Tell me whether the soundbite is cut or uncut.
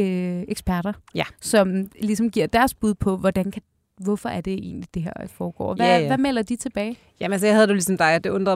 uncut